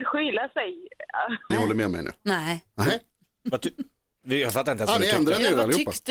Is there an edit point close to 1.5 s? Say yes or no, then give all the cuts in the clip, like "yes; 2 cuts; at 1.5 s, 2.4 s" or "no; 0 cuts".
yes; 1 cut; at 1.5 s